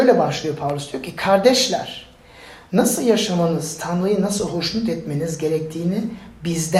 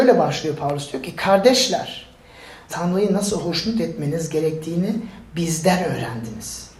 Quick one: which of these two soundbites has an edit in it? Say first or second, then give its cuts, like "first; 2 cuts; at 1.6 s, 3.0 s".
second; 1 cut; at 2.7 s